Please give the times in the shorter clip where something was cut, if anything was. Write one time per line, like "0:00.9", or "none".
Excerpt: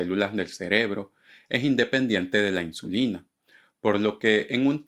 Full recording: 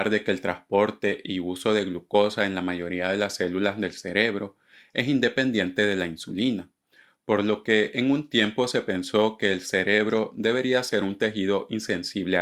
none